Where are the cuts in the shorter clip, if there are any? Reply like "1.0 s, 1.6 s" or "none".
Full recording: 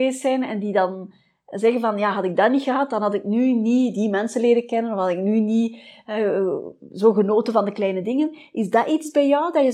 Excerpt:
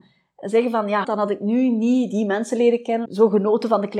1.0 s, 3.0 s